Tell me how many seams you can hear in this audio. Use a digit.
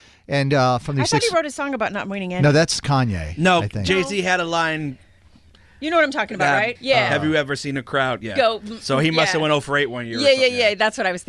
1